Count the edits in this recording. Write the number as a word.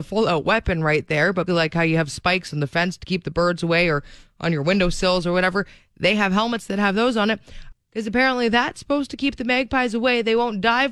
two